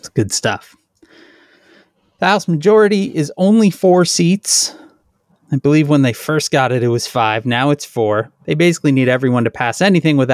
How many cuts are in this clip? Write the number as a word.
zero